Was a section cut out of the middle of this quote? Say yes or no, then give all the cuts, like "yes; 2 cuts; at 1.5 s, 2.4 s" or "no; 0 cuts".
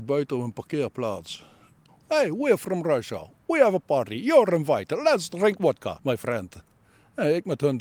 yes; 1 cut; at 1.9 s